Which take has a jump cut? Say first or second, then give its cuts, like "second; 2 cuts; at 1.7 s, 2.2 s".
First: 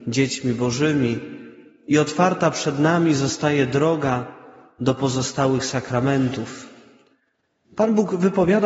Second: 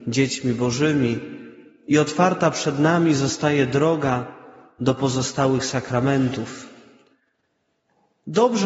first; 1 cut; at 7.6 s